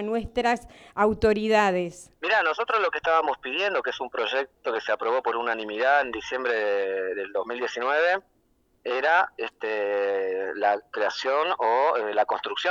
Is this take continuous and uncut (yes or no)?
no